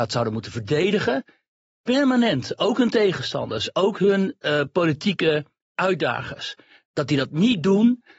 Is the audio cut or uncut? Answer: uncut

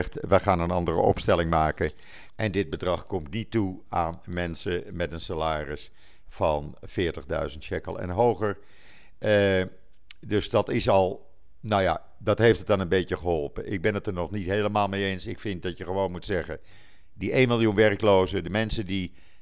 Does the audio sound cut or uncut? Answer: uncut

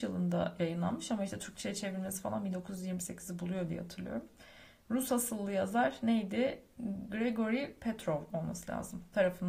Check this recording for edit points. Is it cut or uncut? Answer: uncut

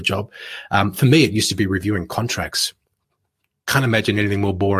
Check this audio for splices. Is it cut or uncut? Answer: uncut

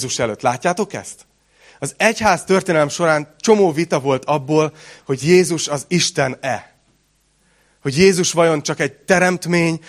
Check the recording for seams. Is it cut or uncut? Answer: uncut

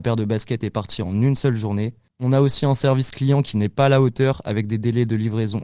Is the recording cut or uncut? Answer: uncut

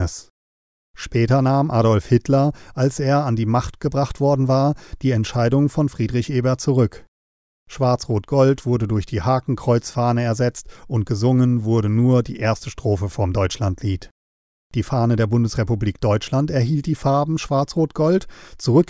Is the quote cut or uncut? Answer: uncut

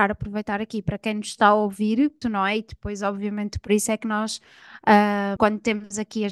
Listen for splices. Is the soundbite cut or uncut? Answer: cut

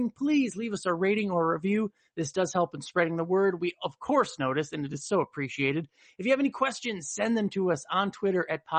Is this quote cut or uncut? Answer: uncut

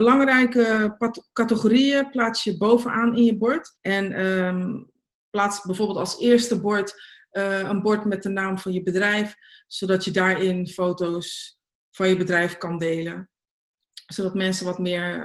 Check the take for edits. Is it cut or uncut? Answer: cut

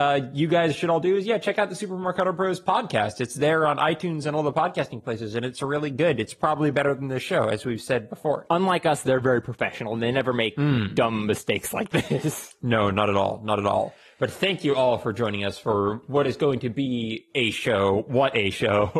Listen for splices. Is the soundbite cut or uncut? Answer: uncut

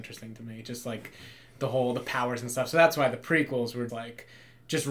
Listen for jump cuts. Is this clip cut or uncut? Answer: cut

